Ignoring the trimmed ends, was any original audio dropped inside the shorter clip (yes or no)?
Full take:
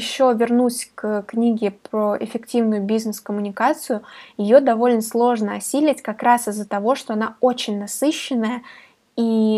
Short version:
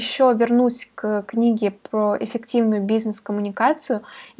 no